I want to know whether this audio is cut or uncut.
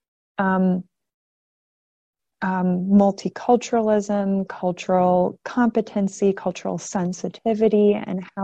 uncut